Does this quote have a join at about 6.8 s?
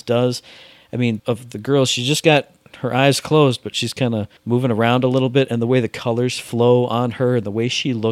no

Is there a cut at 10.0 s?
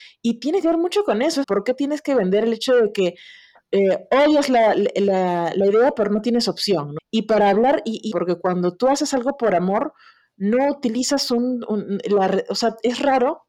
no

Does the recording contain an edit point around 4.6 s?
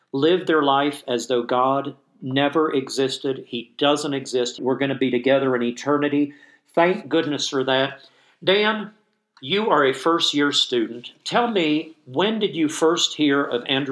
yes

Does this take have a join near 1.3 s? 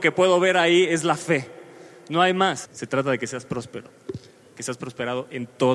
no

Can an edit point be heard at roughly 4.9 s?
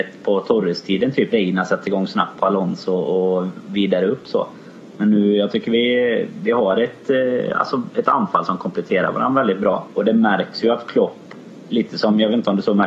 no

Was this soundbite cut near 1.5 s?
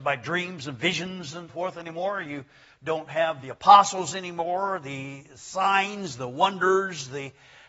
yes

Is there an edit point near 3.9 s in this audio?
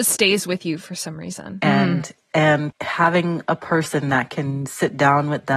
no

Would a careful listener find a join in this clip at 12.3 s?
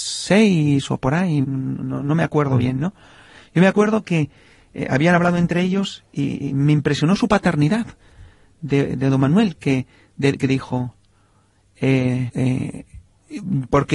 yes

